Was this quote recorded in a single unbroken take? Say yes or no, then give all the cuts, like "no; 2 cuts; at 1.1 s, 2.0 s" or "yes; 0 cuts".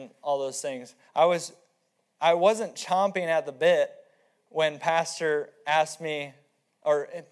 no; 1 cut; at 1.1 s